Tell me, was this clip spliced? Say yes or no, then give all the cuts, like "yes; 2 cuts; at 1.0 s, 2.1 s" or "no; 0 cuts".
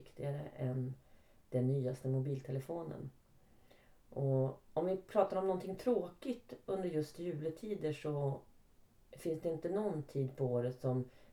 no; 0 cuts